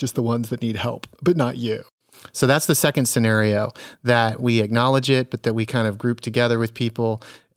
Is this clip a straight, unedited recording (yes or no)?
yes